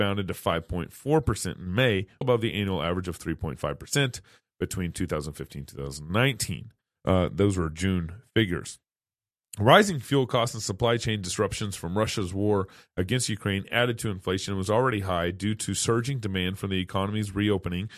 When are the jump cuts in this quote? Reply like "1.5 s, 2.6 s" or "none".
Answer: 2.2 s, 7.0 s